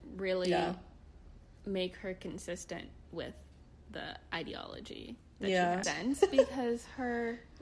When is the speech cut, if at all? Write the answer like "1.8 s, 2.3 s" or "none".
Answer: 5.8 s

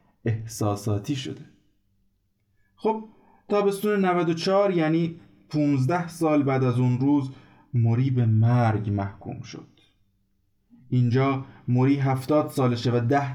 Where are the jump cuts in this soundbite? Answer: none

